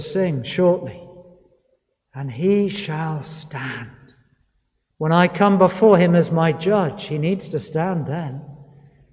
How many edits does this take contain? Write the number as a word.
one